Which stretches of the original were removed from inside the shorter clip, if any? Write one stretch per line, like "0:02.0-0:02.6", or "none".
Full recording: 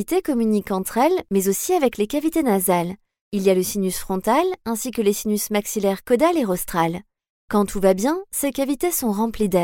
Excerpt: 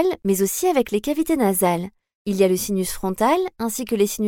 none